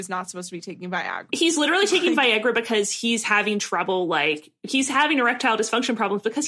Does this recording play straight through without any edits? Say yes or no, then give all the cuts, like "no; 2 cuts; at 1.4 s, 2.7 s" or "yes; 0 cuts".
no; 1 cut; at 1.3 s